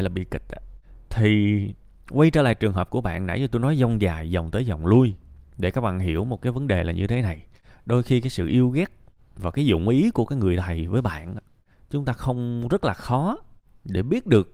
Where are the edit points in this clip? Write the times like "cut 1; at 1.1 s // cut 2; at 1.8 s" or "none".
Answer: none